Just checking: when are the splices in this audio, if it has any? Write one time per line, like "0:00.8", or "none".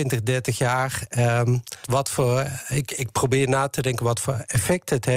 0:01.8

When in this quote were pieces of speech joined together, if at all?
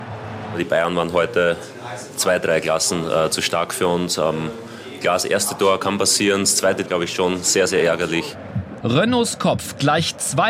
0:06.9
0:08.8

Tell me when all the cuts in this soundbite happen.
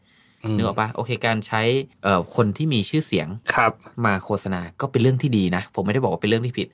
0:01.9
0:03.4

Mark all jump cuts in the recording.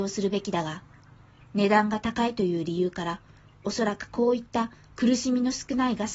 none

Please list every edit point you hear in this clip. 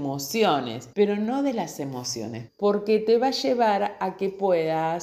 0:00.9
0:02.5

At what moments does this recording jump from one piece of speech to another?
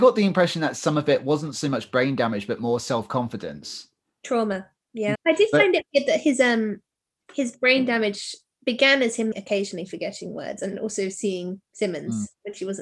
0:05.1
0:09.3

